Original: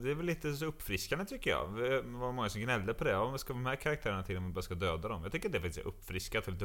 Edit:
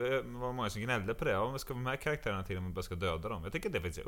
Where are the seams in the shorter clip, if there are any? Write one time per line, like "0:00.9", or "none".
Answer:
none